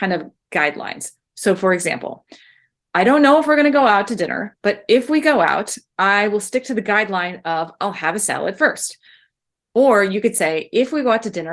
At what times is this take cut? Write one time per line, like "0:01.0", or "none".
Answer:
none